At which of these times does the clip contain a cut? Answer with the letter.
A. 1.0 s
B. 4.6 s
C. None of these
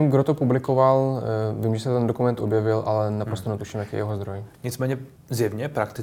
C